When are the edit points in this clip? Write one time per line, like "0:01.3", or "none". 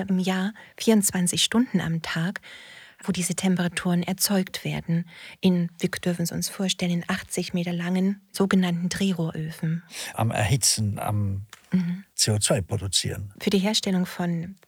0:10.1
0:13.4